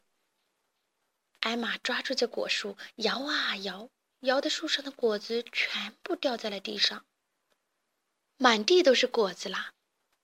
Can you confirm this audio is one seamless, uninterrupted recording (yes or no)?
yes